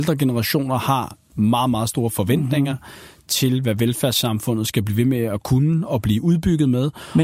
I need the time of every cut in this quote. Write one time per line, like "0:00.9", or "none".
none